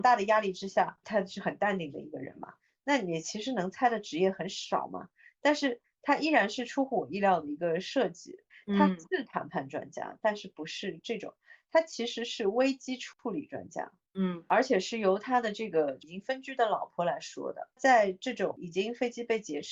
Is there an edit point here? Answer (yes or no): no